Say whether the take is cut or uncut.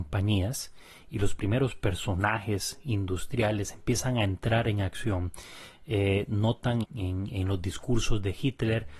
cut